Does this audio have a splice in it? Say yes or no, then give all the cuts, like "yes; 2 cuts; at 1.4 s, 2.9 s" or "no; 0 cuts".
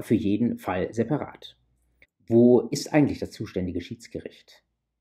yes; 1 cut; at 2.0 s